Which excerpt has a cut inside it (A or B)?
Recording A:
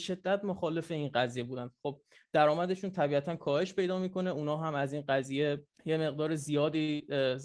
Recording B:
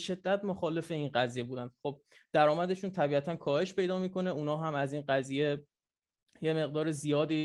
A